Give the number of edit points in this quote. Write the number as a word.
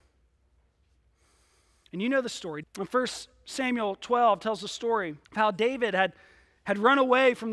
two